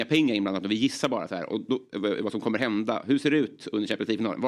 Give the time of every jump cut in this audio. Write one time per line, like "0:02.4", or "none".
none